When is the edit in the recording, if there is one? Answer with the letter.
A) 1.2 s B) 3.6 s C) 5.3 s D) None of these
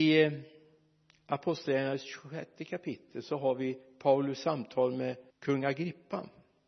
C